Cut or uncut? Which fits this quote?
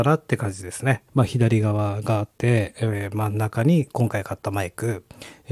cut